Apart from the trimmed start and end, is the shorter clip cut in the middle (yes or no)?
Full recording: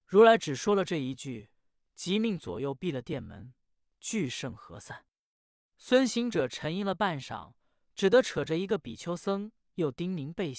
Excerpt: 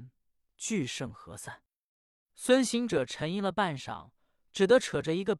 no